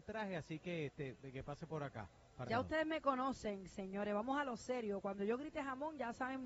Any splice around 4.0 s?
no; 1 cut; at 2.5 s

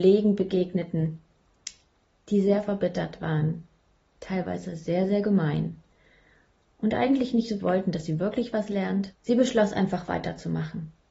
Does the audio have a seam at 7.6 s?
yes; 2 cuts; at 7.6 s, 9.1 s

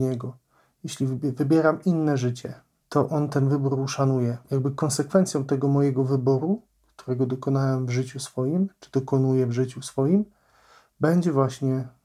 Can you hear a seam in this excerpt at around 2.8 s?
yes; 2 cuts; at 2.8 s, 4.4 s

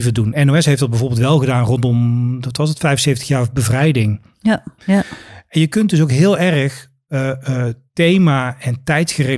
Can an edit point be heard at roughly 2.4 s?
no; 1 cut; at 4.8 s

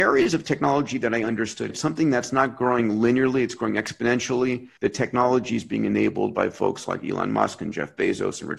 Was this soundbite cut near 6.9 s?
no; 2 cuts; at 1.7 s, 4.8 s

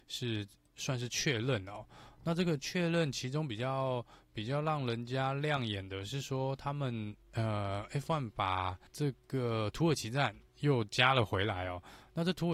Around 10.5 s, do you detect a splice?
yes; 2 cuts; at 8.9 s, 10.5 s

